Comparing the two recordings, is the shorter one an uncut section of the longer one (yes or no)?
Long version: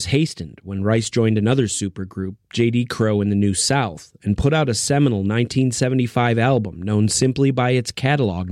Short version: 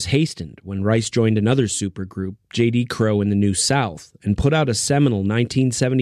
yes